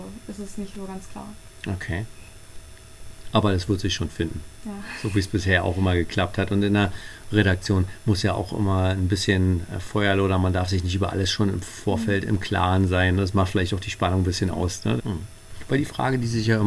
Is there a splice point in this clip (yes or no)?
yes